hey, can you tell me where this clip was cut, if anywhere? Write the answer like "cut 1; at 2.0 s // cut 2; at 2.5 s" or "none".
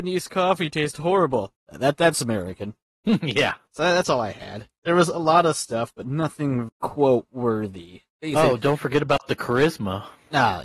cut 1; at 6.7 s